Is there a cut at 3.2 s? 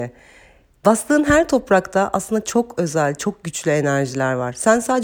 yes; 1 cut; at 3.2 s

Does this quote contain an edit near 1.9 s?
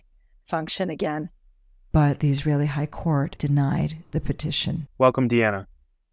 yes; 2 cuts; at 1.9 s, 4.9 s

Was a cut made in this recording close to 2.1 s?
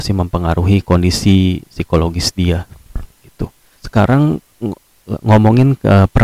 no; 1 cut; at 3.8 s

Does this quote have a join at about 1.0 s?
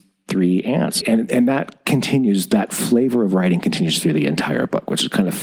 yes; 1 cut; at 1.0 s

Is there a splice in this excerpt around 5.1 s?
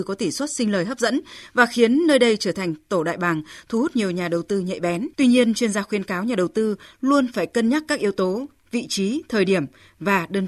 yes; 1 cut; at 5.1 s

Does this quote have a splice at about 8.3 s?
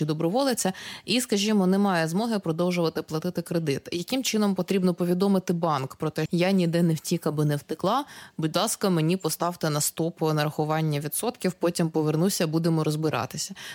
no; 1 cut; at 6.3 s

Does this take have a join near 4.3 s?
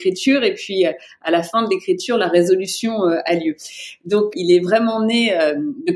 yes; 1 cut; at 4.3 s

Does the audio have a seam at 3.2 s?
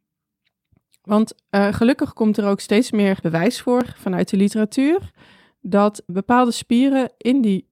yes; 2 cuts; at 3.2 s, 6.1 s

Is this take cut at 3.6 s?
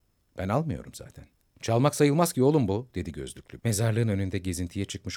yes; 2 cuts; at 1.6 s, 3.6 s

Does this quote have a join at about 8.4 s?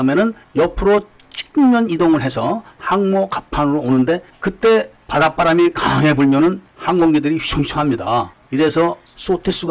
yes; 1 cut; at 8.4 s

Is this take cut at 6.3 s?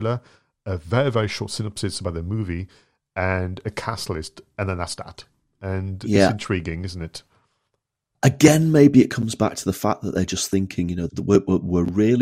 no; 1 cut; at 11.1 s

